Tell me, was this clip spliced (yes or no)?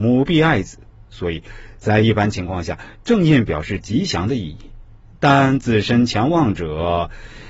no